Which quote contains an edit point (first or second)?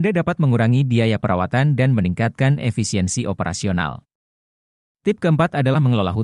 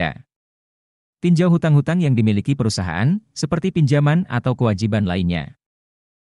second